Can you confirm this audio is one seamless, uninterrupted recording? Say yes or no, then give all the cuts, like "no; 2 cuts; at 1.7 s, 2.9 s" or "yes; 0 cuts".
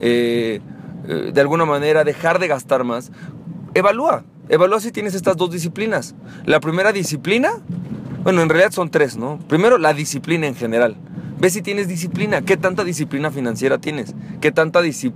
yes; 0 cuts